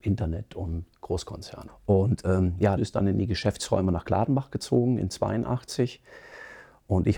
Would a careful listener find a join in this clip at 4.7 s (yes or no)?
no